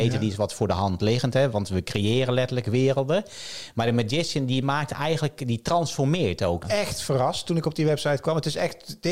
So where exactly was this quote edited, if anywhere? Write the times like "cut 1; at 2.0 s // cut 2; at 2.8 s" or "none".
cut 1; at 6.6 s